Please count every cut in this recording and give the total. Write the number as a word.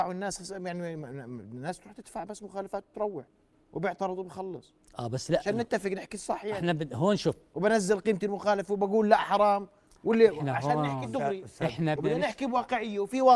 one